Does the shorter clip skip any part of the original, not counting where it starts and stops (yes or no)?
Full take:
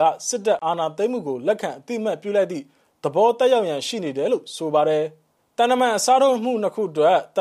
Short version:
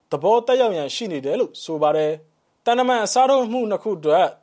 no